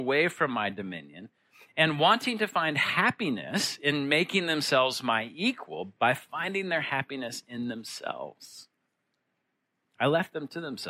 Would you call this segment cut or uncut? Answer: uncut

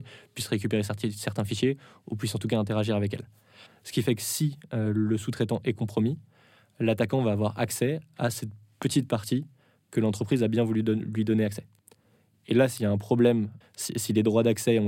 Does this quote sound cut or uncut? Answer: cut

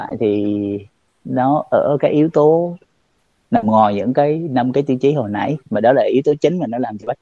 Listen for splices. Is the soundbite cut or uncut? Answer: cut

